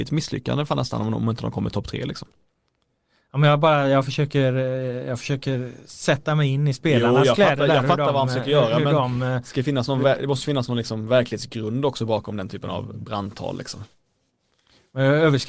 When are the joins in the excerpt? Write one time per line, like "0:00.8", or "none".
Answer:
none